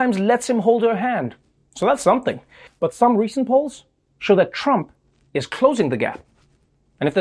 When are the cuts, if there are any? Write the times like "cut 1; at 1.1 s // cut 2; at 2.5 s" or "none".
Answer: none